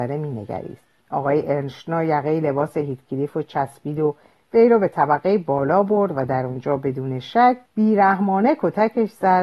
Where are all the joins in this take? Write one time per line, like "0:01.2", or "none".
0:01.0
0:07.7